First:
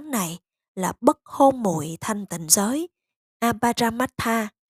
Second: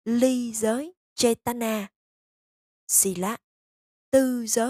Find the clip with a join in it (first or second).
second